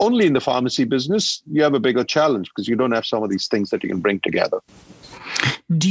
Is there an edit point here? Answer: no; 0 cuts

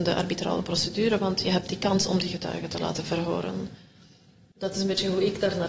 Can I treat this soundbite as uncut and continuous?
yes; 0 cuts

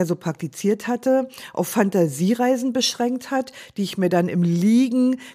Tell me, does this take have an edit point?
no; 0 cuts

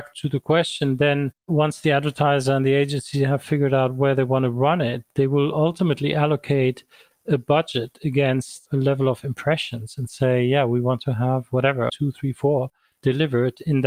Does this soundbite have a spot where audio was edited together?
yes; 1 cut; at 11.9 s

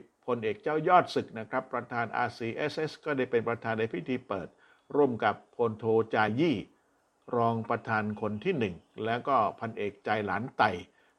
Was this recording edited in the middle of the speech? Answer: no; 0 cuts

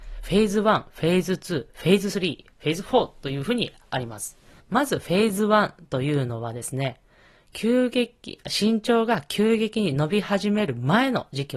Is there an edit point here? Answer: yes; 1 cut; at 4.6 s

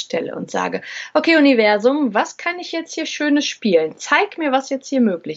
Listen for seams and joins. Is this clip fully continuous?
yes; 0 cuts

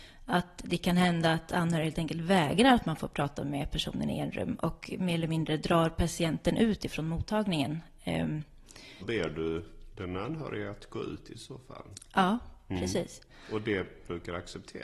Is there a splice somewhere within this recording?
yes; 1 cut; at 9.0 s

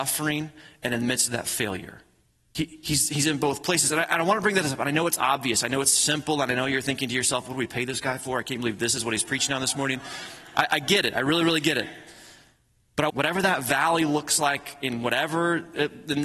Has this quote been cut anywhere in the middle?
yes; 1 cut; at 13.1 s

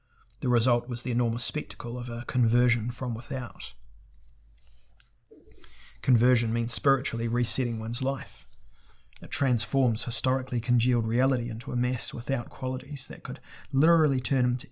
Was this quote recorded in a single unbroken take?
no; 1 cut; at 9.1 s

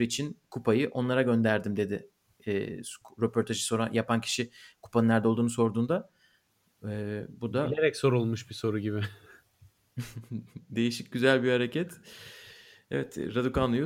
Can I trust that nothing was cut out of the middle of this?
yes; 0 cuts

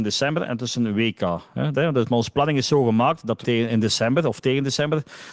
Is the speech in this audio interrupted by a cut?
yes; 2 cuts; at 1.7 s, 3.4 s

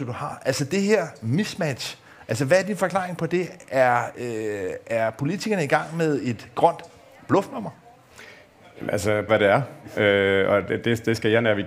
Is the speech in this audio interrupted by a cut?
yes; 1 cut; at 9.3 s

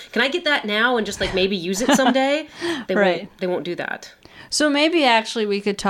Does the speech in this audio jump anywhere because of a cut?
no; 0 cuts

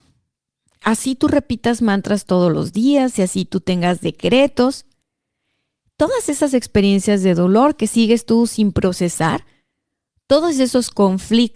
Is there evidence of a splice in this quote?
no; 0 cuts

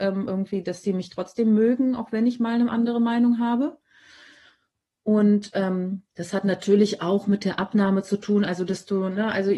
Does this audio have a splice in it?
no; 0 cuts

